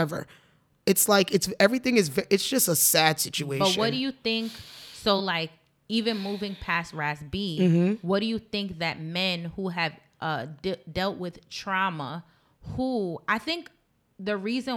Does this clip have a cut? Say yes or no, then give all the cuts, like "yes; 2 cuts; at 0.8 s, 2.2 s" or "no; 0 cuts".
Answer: no; 0 cuts